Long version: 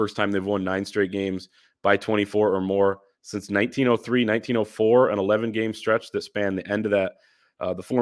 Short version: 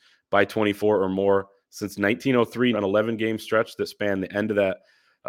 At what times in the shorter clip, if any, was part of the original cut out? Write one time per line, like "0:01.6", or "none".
0:02.7